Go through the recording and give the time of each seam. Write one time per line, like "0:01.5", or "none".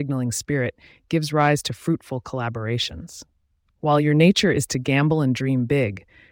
0:03.6